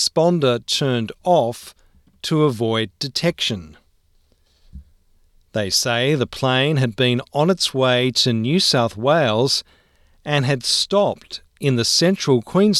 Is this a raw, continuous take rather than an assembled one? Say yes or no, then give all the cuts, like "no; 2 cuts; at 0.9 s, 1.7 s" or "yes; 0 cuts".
yes; 0 cuts